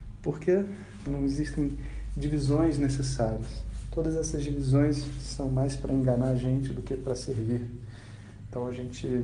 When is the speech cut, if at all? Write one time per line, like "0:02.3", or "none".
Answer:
0:01.1